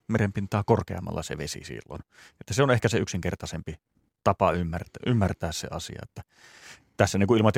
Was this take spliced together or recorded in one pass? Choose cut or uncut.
uncut